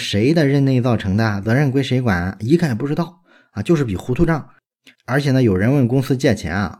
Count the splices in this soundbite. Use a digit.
0